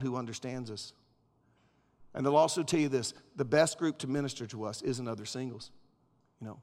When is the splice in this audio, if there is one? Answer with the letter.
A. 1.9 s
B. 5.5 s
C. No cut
C